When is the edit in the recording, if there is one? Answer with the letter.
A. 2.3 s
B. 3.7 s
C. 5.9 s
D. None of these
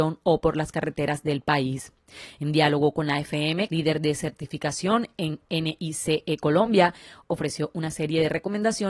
B